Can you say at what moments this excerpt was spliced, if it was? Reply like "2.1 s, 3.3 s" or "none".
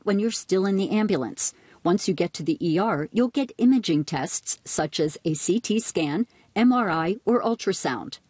none